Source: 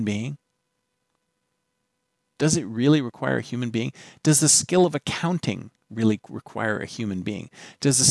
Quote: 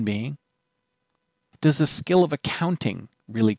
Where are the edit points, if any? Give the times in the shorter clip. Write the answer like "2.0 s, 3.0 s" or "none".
1.5 s